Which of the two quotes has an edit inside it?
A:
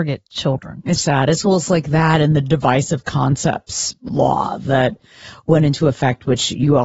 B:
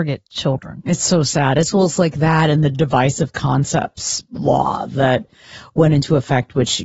A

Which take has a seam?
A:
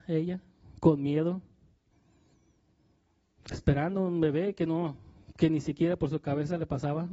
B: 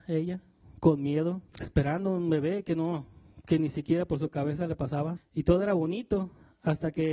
B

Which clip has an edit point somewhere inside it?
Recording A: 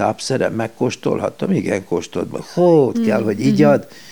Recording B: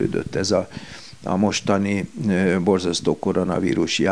A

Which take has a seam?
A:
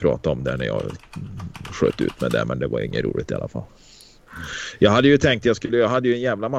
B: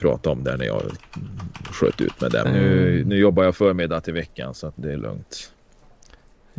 B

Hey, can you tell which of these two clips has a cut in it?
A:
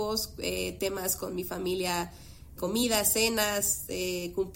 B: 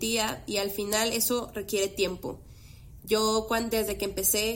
A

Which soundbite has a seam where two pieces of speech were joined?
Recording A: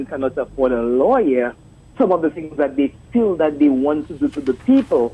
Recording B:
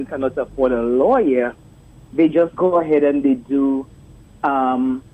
A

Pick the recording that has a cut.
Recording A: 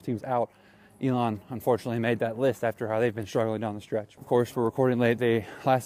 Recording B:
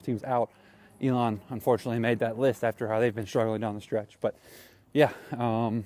A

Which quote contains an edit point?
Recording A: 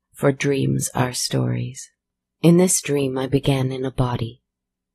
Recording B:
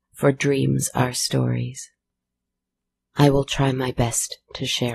A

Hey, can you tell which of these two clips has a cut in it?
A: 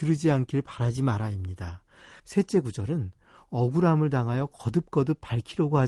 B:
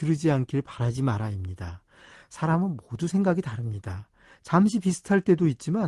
A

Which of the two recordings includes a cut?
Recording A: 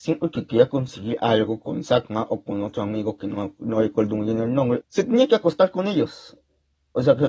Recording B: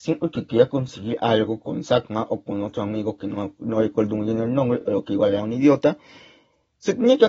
A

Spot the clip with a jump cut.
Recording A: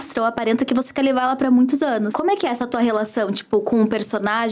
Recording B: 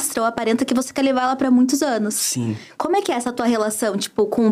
A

